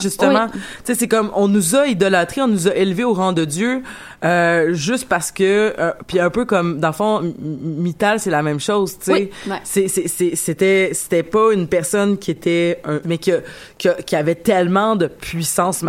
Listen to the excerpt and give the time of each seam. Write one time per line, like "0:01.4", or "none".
0:13.0